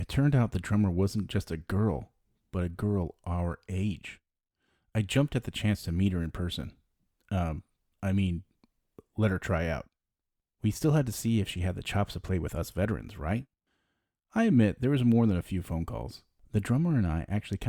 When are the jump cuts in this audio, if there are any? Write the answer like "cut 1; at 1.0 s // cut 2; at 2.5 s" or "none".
none